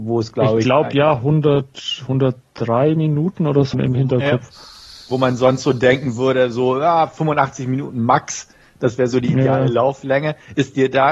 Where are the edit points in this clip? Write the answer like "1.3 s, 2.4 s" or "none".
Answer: 3.7 s

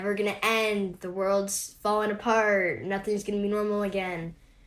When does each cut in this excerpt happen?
none

